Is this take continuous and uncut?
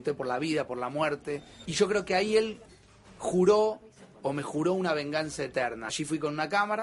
no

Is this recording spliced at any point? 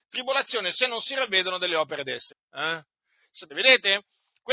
yes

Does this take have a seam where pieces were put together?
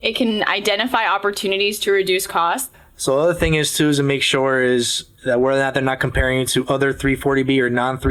no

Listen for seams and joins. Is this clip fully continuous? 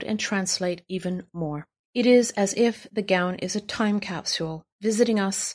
no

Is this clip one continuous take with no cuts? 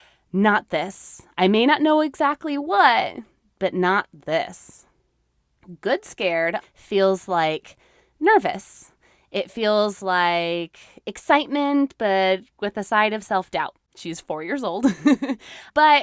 no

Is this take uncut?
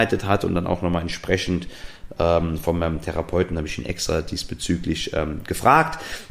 yes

